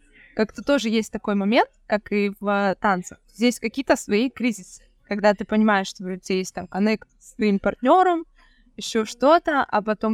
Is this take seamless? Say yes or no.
yes